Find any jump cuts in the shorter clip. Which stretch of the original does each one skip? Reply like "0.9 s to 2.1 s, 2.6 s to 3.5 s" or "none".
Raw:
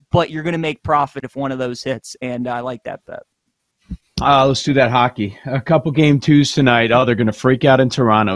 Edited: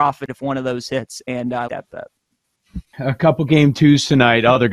2.6 s to 2.8 s, 4.1 s to 5.4 s

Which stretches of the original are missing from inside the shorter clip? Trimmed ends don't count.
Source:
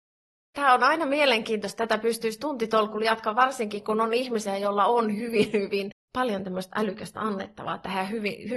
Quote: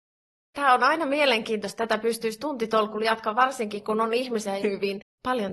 4.6 s to 5.5 s

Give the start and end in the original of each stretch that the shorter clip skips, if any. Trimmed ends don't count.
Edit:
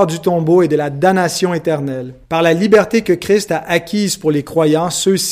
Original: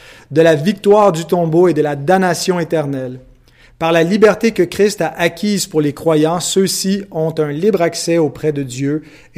3.3 s to 3.7 s

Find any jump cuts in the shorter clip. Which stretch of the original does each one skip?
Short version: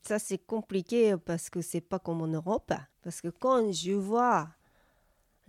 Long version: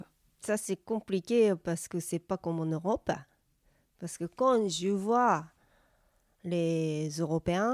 3.3 s to 3.9 s

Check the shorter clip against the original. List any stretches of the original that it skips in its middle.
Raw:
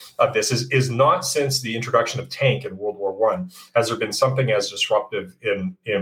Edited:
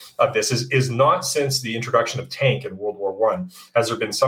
none

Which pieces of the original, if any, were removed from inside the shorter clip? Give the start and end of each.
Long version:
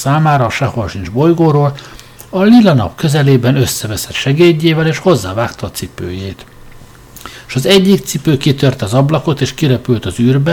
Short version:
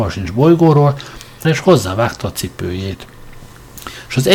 2.2 s to 4.8 s

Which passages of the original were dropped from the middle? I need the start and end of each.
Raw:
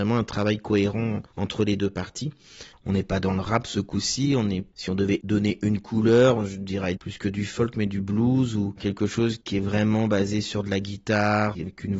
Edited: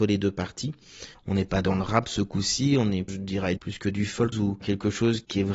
4.7 s to 6.5 s, 7.7 s to 8.5 s

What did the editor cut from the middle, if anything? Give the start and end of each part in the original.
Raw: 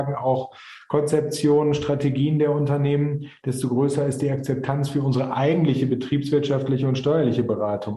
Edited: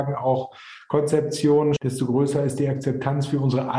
1.8 s to 3.4 s

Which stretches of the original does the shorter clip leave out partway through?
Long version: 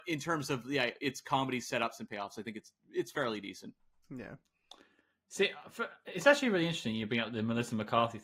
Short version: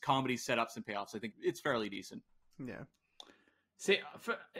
2.5 s to 2.8 s

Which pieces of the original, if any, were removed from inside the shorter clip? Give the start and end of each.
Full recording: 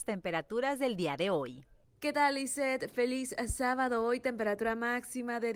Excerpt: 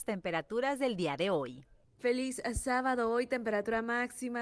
2.0 s to 2.9 s

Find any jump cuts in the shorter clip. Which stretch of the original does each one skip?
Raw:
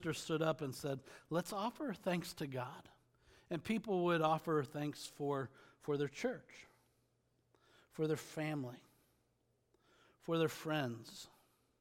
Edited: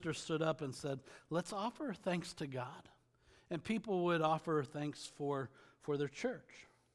none

